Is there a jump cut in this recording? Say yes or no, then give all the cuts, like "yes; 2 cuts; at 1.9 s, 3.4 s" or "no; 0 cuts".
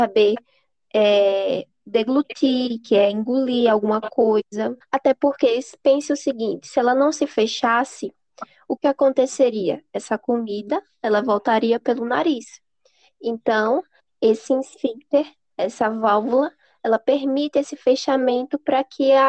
yes; 1 cut; at 4.8 s